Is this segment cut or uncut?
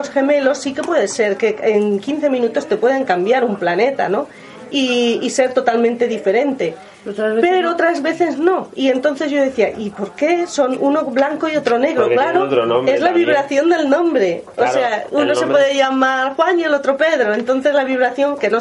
uncut